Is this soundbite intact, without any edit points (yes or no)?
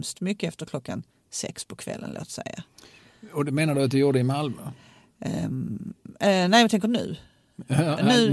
yes